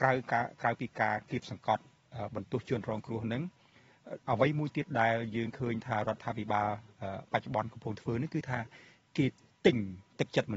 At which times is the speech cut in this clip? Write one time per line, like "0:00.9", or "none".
0:04.2